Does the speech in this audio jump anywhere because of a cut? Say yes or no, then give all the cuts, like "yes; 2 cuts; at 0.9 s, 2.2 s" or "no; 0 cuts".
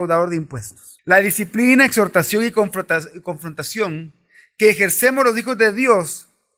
yes; 1 cut; at 1.0 s